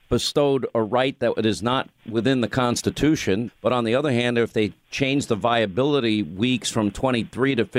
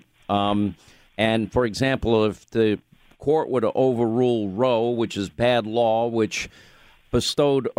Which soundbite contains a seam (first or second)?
first